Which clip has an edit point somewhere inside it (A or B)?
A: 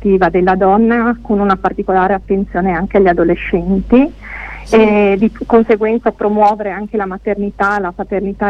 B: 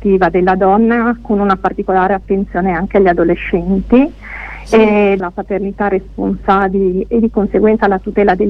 B